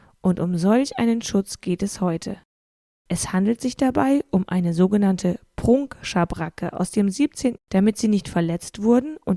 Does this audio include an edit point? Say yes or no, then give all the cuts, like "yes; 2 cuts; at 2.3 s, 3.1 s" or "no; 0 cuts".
yes; 1 cut; at 7.6 s